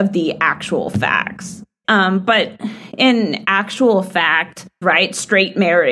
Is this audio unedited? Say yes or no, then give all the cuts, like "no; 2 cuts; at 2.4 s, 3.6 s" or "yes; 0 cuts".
no; 2 cuts; at 1.8 s, 4.8 s